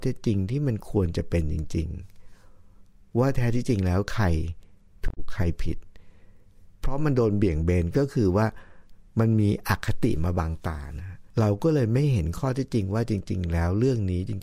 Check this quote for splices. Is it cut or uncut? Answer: cut